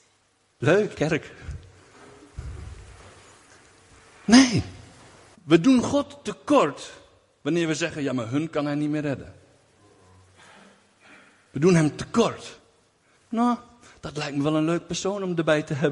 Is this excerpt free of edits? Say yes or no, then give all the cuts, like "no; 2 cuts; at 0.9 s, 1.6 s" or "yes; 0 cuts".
no; 3 cuts; at 0.9 s, 5.3 s, 13.2 s